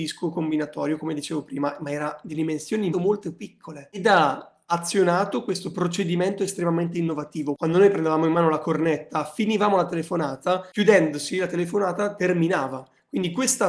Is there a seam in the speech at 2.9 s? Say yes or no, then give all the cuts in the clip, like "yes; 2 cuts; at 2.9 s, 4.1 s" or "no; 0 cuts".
yes; 1 cut; at 2.9 s